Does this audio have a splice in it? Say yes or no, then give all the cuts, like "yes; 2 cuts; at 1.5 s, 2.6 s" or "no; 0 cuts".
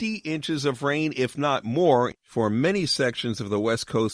no; 0 cuts